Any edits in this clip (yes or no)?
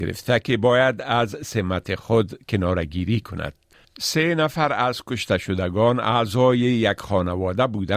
yes